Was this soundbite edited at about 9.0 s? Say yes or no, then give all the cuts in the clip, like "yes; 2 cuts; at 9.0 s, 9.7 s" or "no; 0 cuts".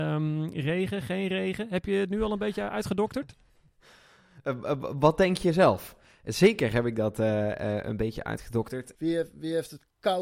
yes; 1 cut; at 9.0 s